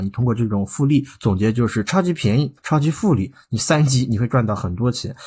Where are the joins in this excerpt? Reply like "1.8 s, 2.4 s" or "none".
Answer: 2.6 s